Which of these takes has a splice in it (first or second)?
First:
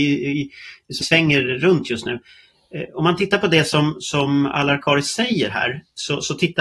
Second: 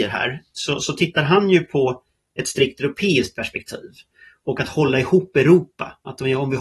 first